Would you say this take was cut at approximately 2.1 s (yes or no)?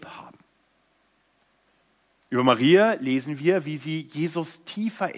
no